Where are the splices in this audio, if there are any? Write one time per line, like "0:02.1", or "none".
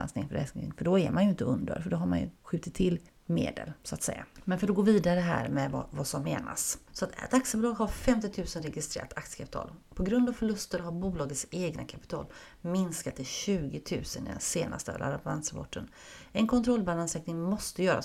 none